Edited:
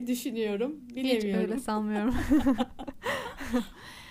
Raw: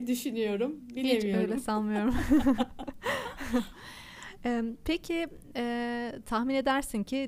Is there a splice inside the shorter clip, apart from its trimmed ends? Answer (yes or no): no